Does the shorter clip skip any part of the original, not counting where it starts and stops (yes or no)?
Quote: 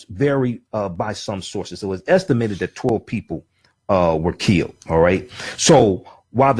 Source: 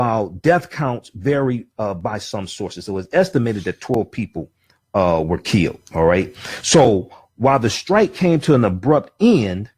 no